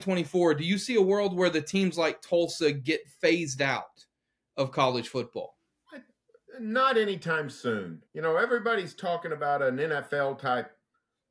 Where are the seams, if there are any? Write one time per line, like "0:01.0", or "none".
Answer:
0:08.1